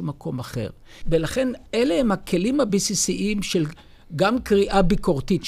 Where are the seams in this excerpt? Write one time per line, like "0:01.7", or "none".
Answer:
0:01.0